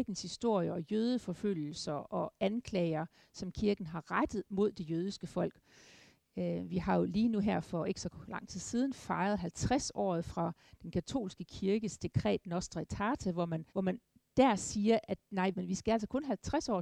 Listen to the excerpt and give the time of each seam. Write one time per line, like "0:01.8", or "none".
0:13.7
0:15.5